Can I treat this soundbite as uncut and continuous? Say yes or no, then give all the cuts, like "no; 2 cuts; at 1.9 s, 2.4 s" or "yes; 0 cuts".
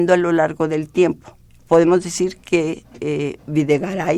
no; 1 cut; at 1.5 s